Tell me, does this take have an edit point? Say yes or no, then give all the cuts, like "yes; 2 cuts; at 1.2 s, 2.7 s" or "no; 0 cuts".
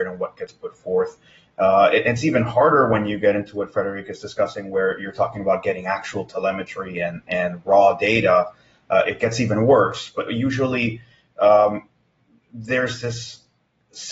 no; 0 cuts